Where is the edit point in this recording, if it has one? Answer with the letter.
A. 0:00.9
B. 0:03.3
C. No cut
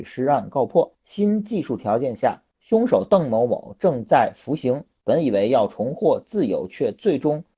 A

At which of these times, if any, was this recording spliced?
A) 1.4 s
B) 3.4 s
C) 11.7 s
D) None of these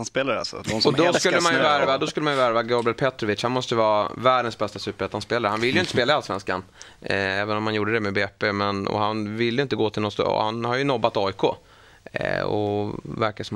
D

